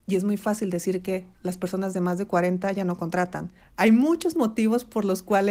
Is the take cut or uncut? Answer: cut